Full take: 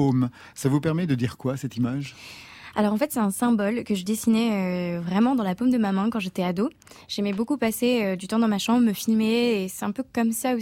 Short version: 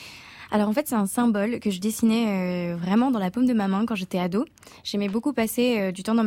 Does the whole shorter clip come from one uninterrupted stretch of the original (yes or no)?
yes